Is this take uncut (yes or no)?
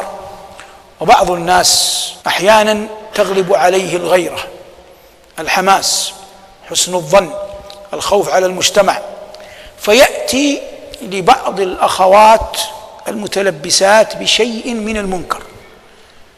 no